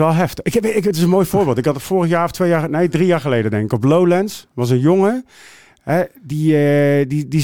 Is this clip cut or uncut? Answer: uncut